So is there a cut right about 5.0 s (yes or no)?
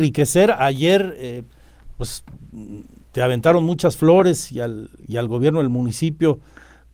no